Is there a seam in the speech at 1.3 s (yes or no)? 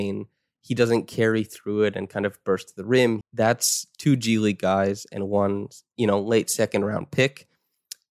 no